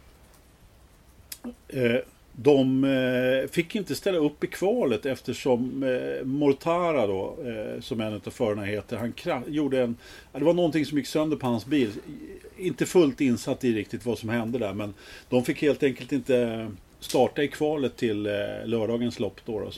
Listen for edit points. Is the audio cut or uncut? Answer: uncut